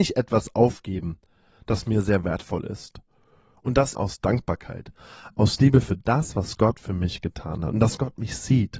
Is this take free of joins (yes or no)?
no